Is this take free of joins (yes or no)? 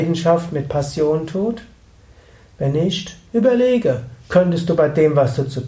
yes